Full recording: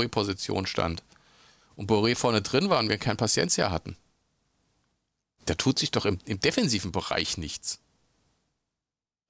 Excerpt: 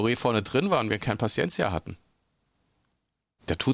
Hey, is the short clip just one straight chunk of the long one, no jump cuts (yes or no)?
yes